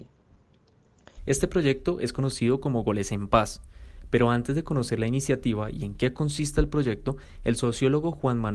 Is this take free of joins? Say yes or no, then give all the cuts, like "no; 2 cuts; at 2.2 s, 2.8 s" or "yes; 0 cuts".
no; 1 cut; at 1.2 s